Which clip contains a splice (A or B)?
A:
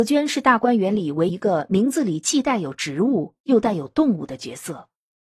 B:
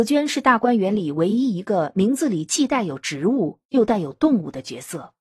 A